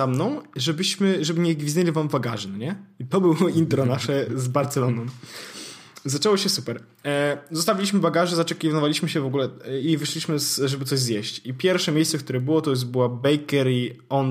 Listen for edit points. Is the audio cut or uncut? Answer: uncut